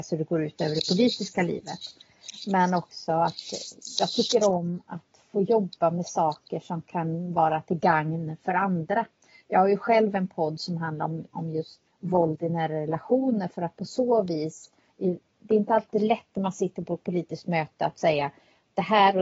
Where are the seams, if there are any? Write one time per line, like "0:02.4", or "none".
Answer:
0:11.9